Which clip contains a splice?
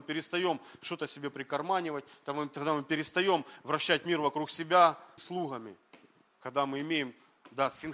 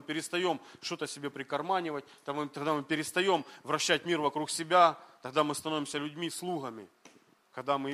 first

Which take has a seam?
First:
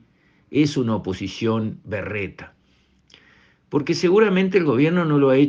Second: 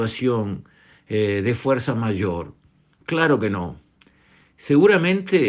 second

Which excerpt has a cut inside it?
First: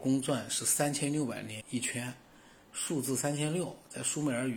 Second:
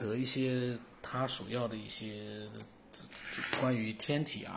first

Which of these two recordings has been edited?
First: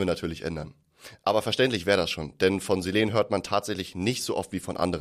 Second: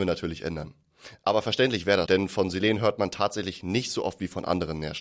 second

